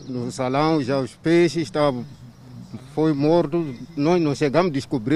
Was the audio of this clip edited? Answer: no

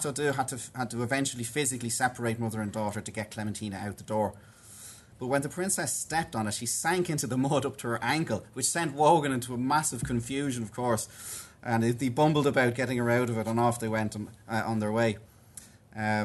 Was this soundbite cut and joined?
yes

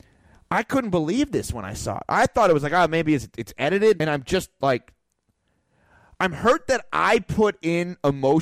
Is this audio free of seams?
no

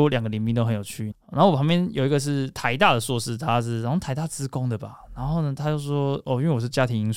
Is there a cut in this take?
yes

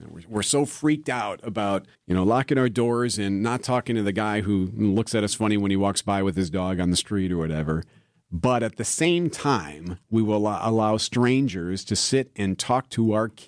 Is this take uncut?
no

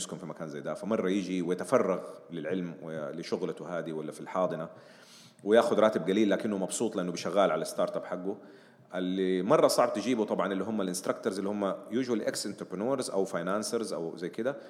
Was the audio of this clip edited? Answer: no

